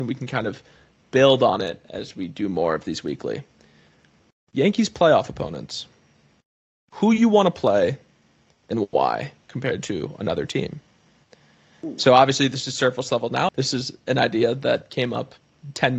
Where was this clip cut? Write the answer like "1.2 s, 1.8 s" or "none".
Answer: 13.5 s